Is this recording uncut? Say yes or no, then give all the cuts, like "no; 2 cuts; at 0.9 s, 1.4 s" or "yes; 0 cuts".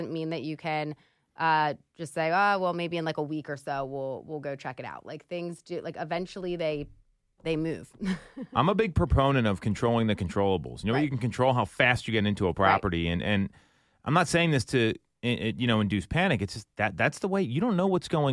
yes; 0 cuts